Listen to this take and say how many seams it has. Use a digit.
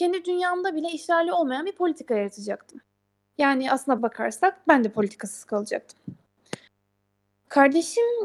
1